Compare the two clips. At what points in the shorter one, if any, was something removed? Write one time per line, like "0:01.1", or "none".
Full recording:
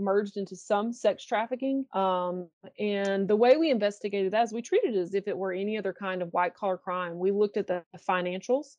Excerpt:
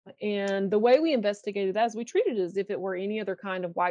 none